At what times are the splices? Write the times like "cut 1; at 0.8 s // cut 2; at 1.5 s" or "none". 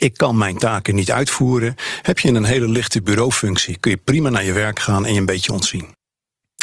none